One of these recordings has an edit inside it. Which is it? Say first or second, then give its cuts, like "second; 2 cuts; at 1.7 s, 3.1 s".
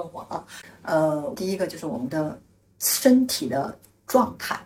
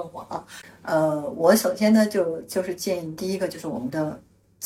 first; 1 cut; at 1.4 s